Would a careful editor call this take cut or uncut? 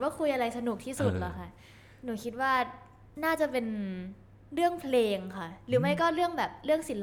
uncut